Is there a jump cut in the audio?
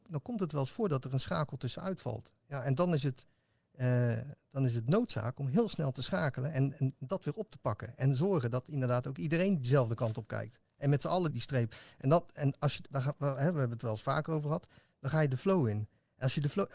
yes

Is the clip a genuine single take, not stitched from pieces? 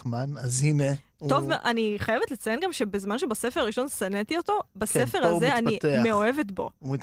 yes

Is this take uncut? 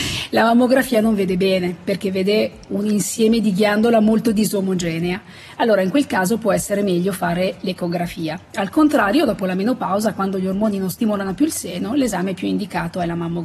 yes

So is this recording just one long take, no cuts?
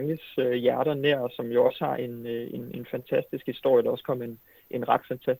yes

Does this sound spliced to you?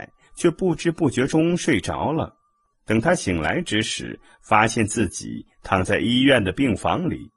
no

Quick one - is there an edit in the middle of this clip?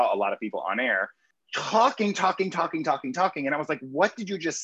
no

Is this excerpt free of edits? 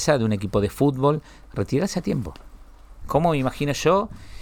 no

